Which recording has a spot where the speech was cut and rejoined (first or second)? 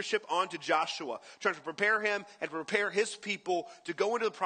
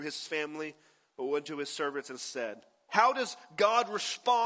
second